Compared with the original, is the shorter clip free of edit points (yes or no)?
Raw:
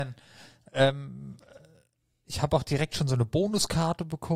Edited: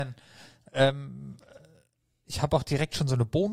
yes